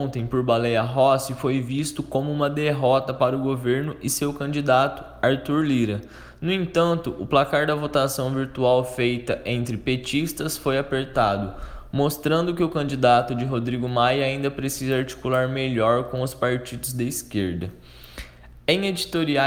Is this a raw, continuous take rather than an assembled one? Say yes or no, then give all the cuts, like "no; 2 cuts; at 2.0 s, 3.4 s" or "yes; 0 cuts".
yes; 0 cuts